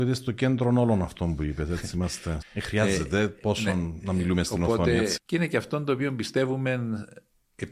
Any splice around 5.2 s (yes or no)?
yes